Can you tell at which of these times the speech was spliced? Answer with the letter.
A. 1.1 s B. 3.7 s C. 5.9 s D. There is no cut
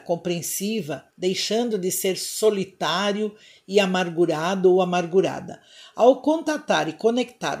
A